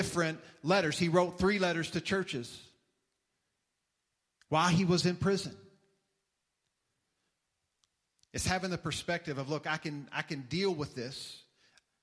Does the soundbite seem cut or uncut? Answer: uncut